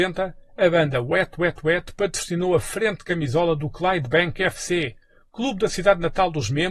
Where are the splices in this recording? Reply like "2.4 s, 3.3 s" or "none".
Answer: none